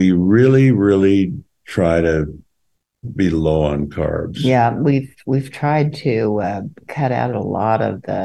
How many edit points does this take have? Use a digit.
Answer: 0